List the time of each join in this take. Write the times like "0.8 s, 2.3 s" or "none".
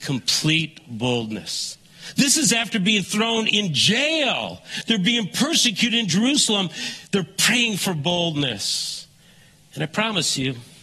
none